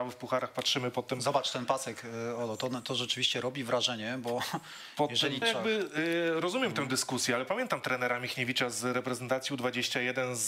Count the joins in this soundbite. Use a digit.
1